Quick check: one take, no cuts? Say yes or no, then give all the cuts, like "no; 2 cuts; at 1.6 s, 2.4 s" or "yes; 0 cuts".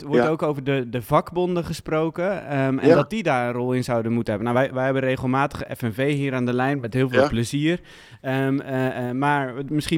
yes; 0 cuts